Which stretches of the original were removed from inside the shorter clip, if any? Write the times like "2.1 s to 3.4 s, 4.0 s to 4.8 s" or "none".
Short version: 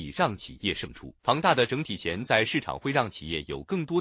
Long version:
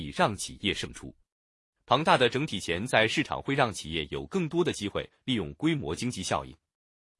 1.2 s to 1.8 s

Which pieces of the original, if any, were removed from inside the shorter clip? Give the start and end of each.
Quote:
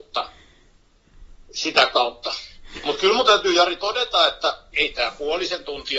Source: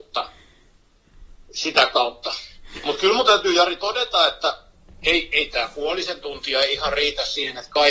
4.7 s to 5.3 s

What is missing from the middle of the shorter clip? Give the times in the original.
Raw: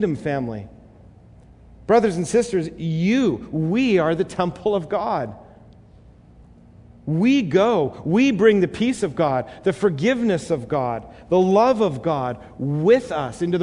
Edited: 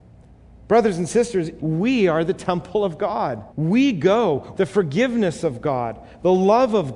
2.8 s to 3.5 s, 5.4 s to 7.0 s, 8.0 s to 9.6 s

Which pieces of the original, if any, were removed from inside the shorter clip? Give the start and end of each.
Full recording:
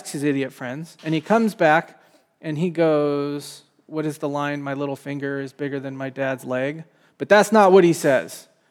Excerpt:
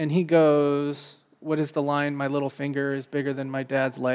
none

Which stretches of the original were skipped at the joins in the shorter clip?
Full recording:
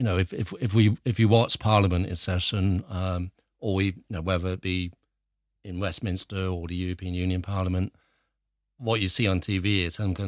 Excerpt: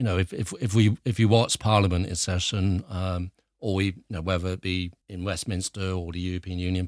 5.0 s to 5.6 s

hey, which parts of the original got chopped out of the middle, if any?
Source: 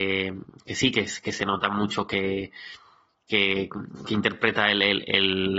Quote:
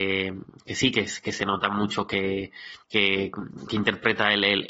2.8 s to 3.2 s

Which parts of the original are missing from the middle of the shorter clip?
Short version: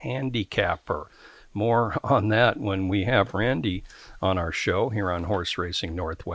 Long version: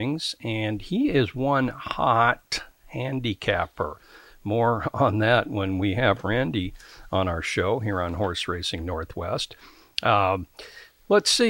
none

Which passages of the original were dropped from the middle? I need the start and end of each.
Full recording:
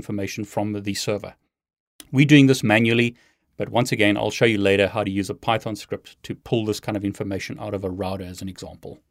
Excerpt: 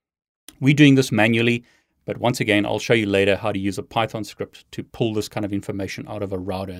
none

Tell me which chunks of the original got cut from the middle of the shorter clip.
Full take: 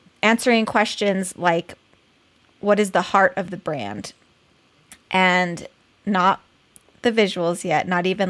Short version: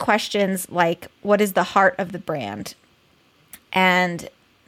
1.8 s to 2.5 s

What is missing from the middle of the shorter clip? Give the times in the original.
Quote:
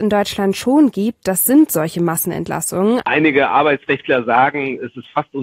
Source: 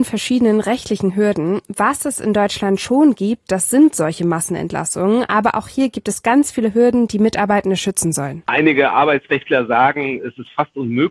5.3 s to 8.4 s

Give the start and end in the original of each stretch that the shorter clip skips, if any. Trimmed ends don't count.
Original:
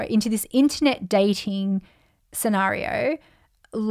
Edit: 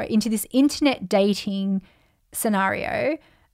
none

